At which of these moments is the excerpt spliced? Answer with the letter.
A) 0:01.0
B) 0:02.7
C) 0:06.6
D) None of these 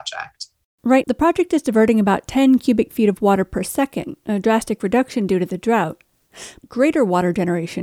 A